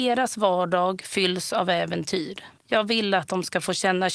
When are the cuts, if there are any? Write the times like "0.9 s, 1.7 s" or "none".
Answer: 2.6 s